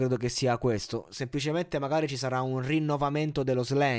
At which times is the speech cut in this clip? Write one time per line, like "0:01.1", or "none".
none